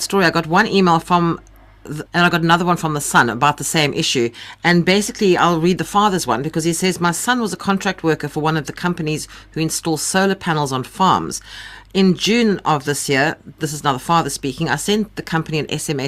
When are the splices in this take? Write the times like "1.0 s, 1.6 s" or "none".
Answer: 2.1 s